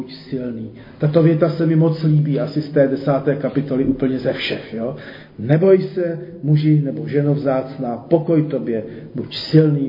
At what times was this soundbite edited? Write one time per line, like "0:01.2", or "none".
none